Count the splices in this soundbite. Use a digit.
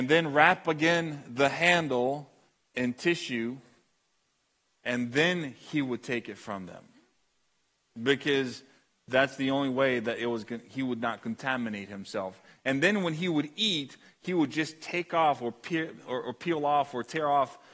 0